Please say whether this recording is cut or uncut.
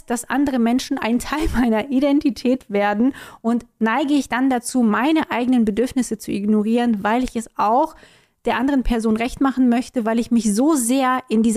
uncut